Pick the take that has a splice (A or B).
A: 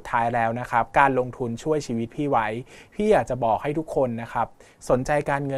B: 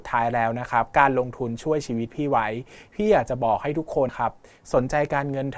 B